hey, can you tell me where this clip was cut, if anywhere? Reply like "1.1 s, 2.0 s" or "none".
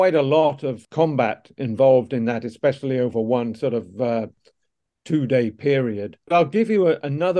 none

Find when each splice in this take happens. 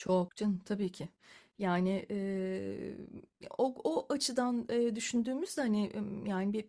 none

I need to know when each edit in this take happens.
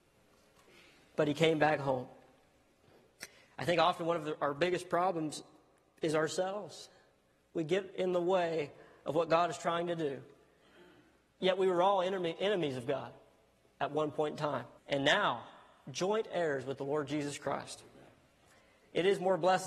14.8 s

